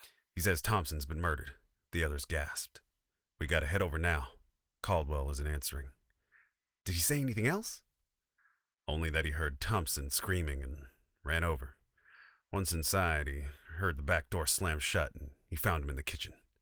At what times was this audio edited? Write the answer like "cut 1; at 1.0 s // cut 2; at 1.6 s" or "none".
none